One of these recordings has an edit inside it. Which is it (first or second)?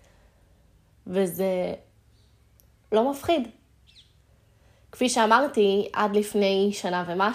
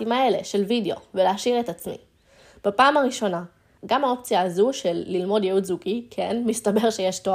second